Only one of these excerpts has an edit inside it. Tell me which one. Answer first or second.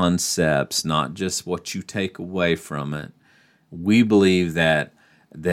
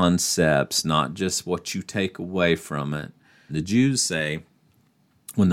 second